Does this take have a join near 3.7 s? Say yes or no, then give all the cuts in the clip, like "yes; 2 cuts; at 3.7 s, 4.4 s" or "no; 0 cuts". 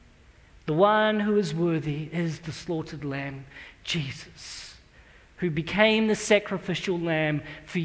no; 0 cuts